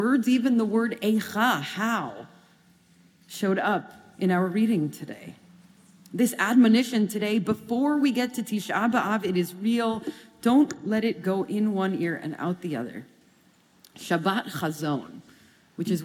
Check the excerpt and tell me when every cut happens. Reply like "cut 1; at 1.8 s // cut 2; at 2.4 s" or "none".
none